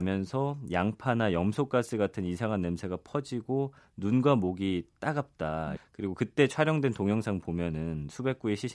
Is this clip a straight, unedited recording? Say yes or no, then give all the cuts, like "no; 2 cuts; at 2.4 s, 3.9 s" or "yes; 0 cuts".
no; 1 cut; at 5.8 s